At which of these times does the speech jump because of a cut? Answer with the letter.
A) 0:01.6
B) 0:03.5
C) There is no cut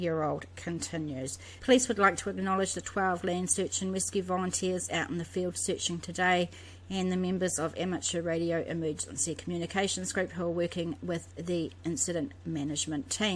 A